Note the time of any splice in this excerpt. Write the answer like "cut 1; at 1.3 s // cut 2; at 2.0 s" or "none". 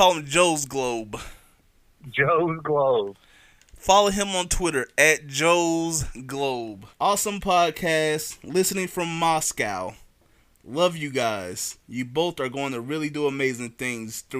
cut 1; at 6.9 s